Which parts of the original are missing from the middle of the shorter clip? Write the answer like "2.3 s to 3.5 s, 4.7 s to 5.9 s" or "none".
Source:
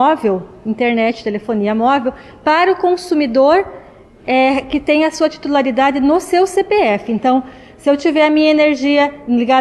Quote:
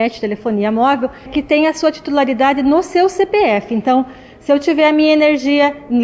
2.3 s to 4.6 s